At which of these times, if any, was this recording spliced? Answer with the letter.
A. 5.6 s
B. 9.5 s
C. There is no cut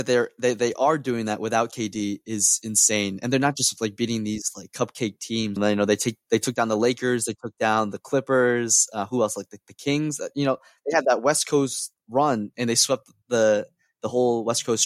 A